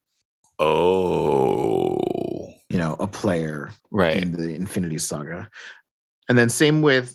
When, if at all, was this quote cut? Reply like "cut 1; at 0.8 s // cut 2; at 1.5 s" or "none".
cut 1; at 2.7 s // cut 2; at 3.8 s